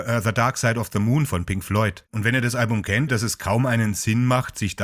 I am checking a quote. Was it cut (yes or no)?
yes